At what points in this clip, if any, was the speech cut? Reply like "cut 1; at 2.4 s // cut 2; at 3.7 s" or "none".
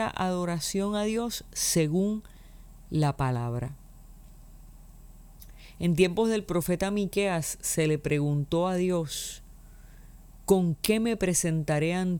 none